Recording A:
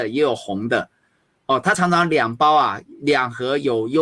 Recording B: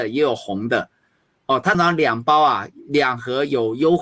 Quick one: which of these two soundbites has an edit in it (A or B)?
B